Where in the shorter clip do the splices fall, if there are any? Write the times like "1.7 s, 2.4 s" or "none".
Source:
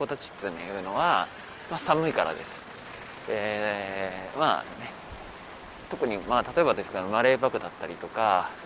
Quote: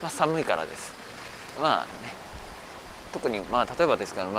1.5 s